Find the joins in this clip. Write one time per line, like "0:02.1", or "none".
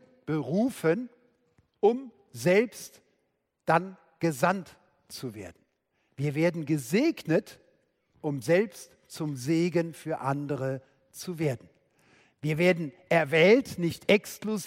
0:06.1